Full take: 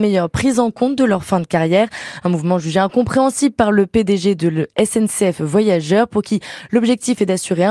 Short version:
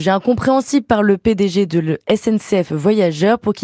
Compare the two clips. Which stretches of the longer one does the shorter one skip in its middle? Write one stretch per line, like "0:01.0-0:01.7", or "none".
none